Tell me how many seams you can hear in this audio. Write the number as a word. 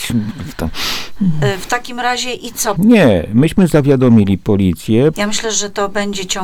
two